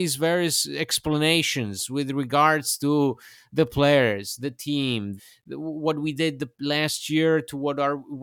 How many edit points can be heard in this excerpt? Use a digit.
1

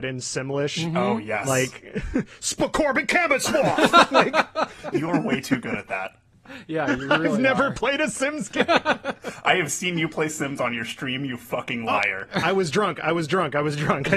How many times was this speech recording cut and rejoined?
0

